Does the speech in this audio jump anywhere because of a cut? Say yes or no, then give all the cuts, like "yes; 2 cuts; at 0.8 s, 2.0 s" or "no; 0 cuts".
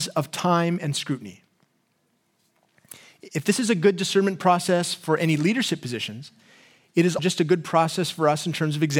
yes; 1 cut; at 7.2 s